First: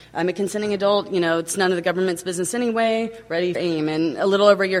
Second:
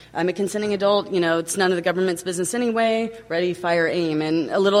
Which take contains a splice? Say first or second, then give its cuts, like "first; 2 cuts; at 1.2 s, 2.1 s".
first; 1 cut; at 3.5 s